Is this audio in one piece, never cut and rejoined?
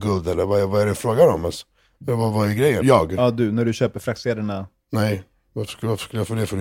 no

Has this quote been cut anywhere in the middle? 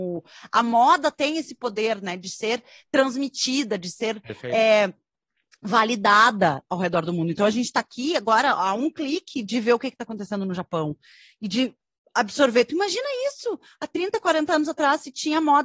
no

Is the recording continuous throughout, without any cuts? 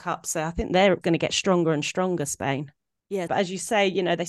no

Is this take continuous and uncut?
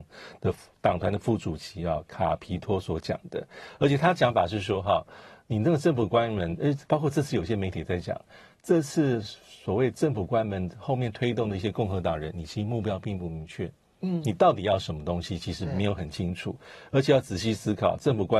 yes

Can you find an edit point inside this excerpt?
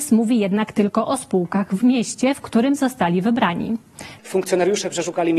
yes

